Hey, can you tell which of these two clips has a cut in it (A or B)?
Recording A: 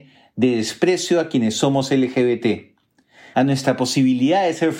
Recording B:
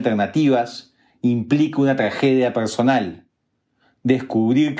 A